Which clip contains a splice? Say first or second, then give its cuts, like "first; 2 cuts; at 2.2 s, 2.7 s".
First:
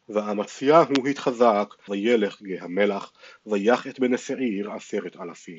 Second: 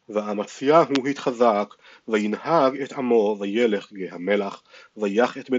first; 1 cut; at 1.9 s